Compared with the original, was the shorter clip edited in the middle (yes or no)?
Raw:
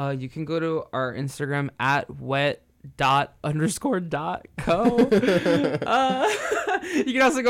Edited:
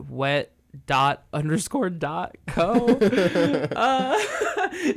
no